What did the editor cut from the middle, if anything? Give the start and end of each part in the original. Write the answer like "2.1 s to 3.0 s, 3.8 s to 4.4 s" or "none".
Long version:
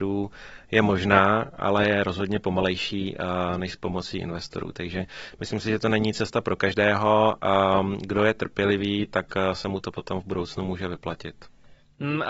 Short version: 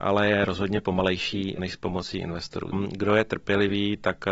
3.2 s to 3.6 s, 4.7 s to 7.8 s